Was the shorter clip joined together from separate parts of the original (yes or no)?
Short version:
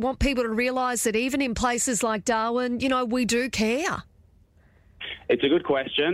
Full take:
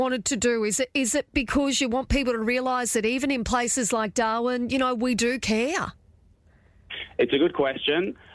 no